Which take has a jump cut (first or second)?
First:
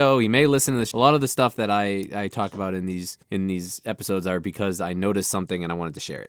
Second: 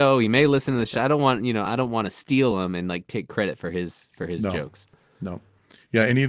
first